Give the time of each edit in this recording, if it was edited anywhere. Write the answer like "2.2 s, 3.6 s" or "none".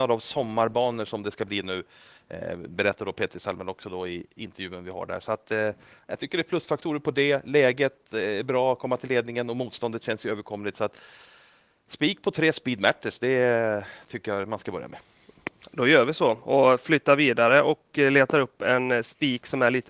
none